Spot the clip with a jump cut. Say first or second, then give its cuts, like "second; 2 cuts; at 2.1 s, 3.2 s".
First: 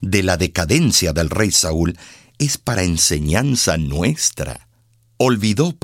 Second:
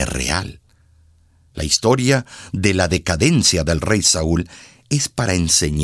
second; 1 cut; at 1.5 s